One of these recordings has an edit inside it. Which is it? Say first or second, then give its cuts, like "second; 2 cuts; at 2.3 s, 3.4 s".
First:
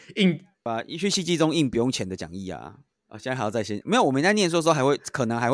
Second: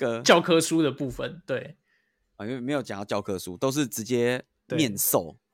first; 1 cut; at 2.9 s